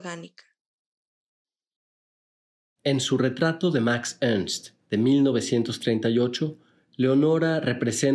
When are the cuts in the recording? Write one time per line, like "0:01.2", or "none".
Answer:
none